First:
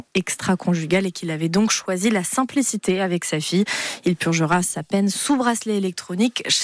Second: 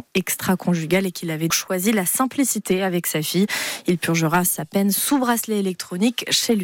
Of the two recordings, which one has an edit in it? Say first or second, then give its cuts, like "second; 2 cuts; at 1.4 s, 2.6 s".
second; 1 cut; at 1.5 s